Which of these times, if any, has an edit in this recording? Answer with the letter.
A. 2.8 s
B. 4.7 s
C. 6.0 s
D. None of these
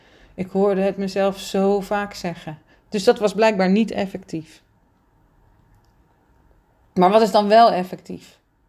A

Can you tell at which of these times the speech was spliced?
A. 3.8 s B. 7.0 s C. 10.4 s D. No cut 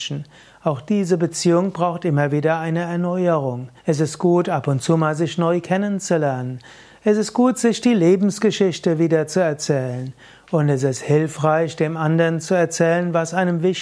A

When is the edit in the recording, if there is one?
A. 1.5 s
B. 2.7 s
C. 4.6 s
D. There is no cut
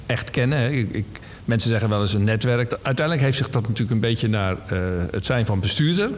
B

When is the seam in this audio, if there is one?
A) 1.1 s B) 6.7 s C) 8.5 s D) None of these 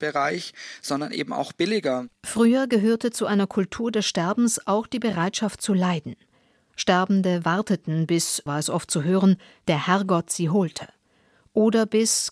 C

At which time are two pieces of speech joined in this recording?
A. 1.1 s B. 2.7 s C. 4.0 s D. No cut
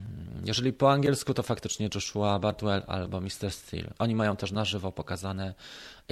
C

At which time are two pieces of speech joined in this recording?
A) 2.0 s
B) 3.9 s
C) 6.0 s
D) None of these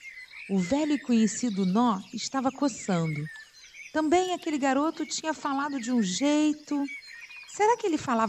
D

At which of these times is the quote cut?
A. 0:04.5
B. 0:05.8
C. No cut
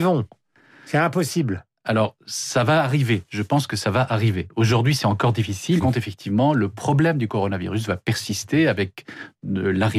B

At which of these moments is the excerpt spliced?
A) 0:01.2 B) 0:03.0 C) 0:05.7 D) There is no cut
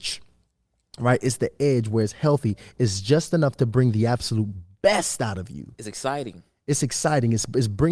D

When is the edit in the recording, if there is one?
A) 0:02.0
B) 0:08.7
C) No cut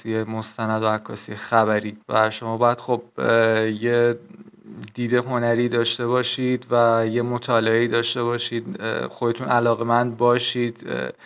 A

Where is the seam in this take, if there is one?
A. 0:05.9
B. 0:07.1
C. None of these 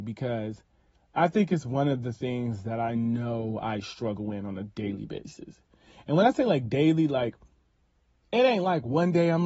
C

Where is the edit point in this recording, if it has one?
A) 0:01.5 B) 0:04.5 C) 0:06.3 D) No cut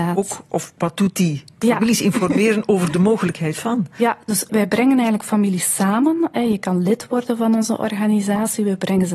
B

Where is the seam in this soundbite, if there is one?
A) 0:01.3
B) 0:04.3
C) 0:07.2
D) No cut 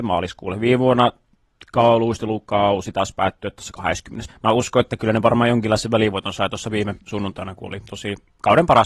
B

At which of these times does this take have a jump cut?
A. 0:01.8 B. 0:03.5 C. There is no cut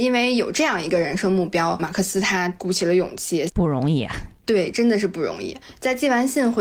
B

